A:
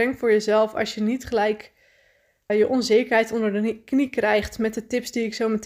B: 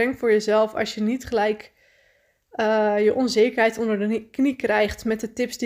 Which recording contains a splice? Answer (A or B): A